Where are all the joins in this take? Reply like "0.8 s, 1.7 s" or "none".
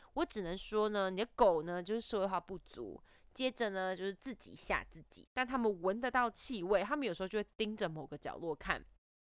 5.3 s